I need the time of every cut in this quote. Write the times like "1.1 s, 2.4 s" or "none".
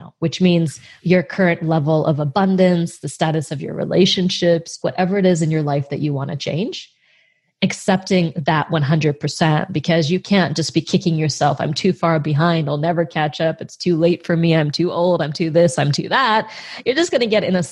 4.8 s